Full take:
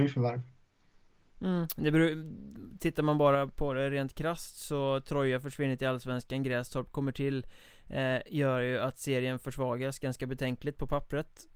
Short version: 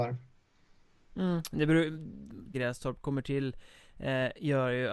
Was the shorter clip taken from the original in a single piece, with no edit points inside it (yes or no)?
no